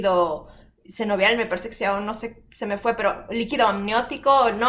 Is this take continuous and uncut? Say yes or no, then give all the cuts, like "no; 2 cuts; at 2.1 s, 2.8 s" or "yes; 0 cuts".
yes; 0 cuts